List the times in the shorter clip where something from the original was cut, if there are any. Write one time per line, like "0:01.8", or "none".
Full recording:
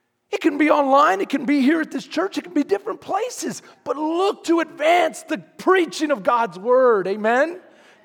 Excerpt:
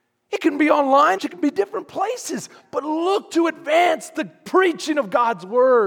0:01.2